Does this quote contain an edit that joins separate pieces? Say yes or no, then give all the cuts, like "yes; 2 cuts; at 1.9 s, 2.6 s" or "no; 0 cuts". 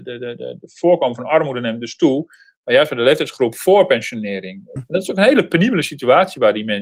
yes; 1 cut; at 4.8 s